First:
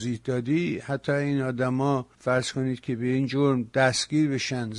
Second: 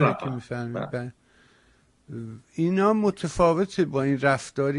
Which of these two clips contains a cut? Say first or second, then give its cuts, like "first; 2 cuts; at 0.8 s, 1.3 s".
first; 1 cut; at 2.2 s